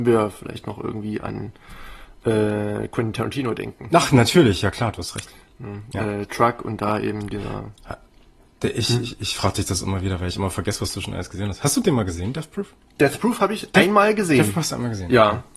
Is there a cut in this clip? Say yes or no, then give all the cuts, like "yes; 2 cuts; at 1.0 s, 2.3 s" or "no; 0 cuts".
no; 0 cuts